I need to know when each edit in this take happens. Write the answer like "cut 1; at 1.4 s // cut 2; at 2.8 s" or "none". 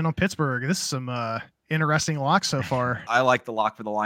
cut 1; at 3.1 s